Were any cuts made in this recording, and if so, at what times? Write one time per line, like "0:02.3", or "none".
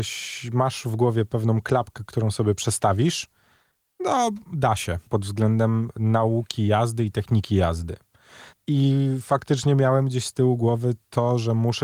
0:05.1
0:08.5

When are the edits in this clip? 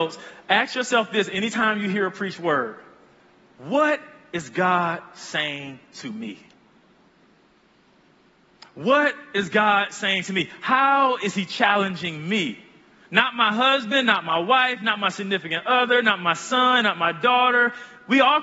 0:13.1

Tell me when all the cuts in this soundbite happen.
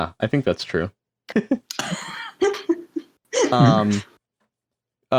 0:01.3

